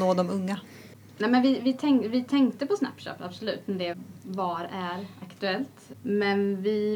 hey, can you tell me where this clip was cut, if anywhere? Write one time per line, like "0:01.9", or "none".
none